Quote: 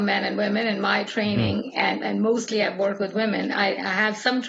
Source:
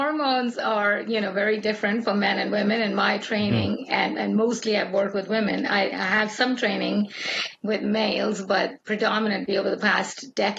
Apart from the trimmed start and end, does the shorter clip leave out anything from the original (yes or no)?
no